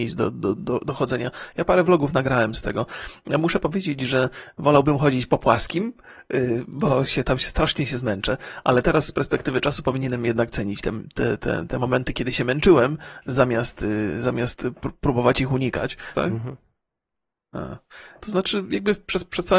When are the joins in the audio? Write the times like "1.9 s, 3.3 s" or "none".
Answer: 11.4 s, 16.1 s, 18.2 s